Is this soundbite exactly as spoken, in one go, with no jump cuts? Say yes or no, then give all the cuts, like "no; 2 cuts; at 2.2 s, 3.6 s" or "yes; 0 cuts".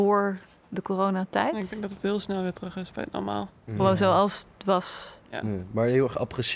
yes; 0 cuts